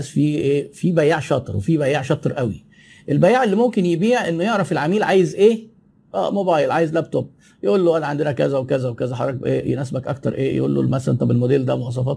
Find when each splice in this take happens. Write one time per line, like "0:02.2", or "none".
none